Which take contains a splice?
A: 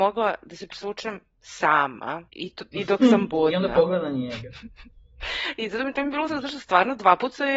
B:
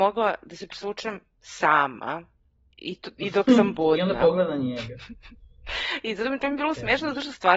A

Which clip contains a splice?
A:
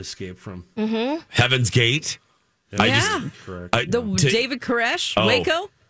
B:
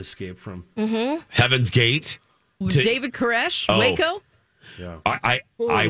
B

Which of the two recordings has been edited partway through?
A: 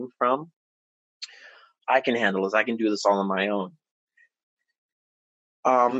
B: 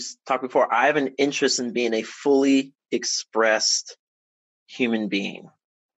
A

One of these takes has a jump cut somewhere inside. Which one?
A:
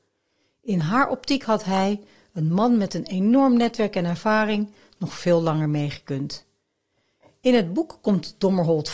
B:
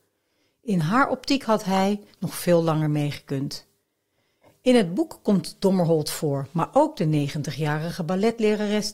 B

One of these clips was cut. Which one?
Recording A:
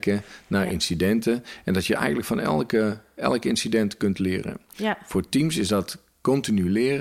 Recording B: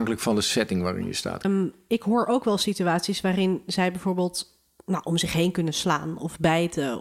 B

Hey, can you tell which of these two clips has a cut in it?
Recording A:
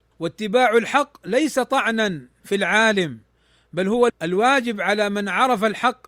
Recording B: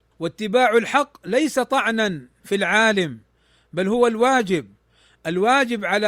A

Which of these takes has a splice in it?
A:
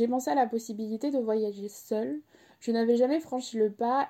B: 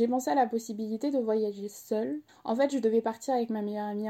B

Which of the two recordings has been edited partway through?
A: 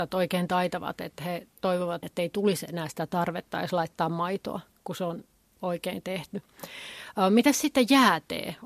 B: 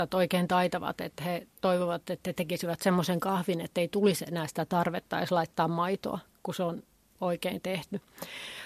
A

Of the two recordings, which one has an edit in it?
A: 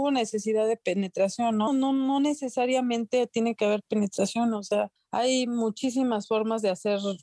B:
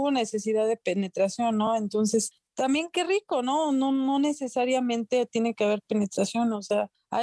A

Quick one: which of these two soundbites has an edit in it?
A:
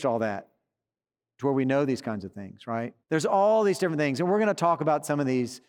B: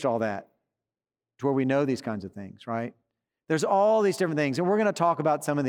A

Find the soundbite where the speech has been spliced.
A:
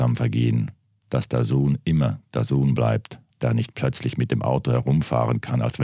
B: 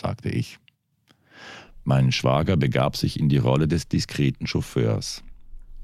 A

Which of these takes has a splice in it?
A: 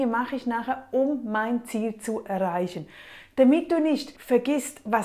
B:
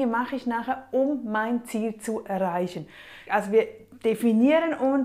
B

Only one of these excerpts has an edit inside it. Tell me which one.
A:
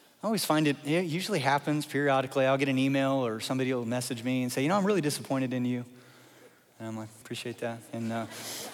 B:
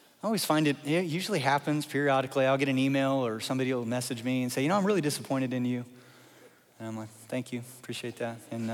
A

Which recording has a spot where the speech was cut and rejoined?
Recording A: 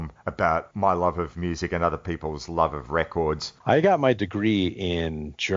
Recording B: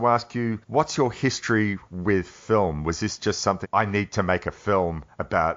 B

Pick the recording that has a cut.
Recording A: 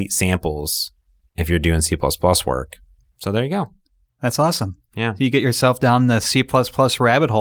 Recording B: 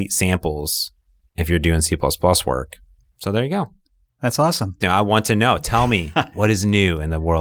B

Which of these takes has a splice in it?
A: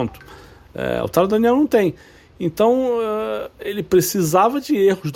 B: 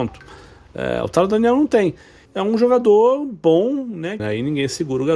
B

